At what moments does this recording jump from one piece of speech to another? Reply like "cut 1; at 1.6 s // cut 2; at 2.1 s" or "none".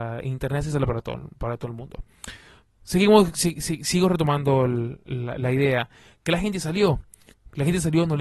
none

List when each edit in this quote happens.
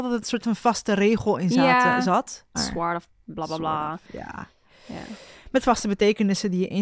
cut 1; at 2.5 s

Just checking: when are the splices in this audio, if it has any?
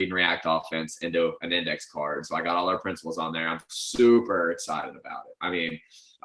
none

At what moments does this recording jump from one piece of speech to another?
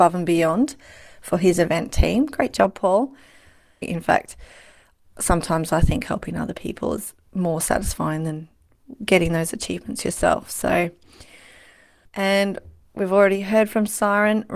cut 1; at 3.8 s

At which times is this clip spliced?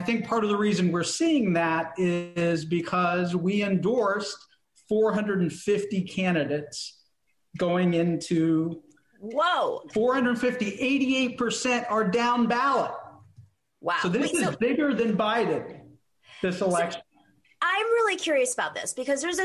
cut 1; at 9.9 s

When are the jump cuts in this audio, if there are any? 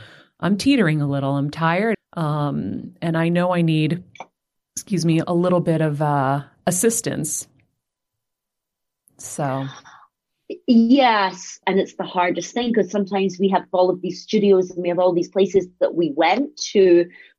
cut 1; at 1.9 s // cut 2; at 11.6 s

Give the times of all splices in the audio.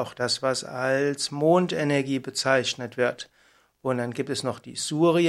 none

